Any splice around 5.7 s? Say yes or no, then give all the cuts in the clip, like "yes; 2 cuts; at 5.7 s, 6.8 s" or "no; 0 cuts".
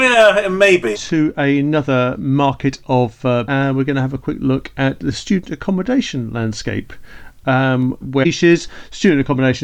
no; 3 cuts; at 0.9 s, 3.5 s, 8.0 s